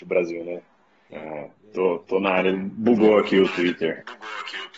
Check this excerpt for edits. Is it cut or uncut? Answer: cut